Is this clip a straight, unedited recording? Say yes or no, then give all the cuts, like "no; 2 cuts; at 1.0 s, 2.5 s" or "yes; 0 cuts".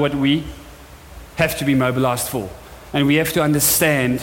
yes; 0 cuts